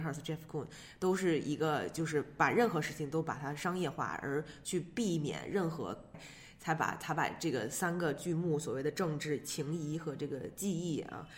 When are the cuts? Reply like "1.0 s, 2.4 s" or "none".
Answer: 6.1 s

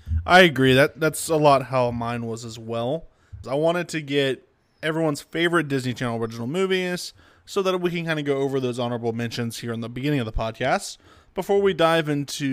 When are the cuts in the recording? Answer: 3.4 s

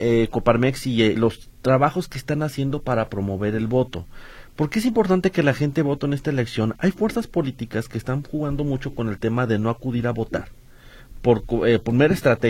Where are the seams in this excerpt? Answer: 1.2 s

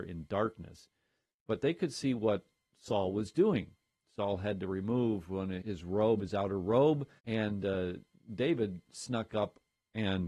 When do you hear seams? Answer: 5.6 s, 7.2 s

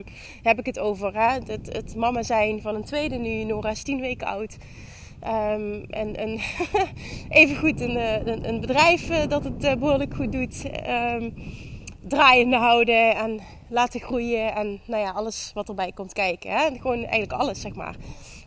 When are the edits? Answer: none

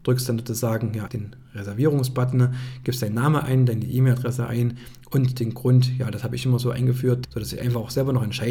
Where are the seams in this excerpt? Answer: 1.1 s, 7.2 s

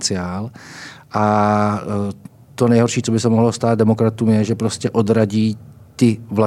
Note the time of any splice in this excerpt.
none

